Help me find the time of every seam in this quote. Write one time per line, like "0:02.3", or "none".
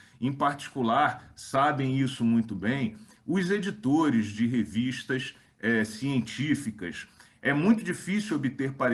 none